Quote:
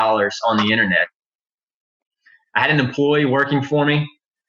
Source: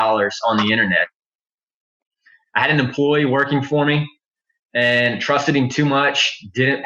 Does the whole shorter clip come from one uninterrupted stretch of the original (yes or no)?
yes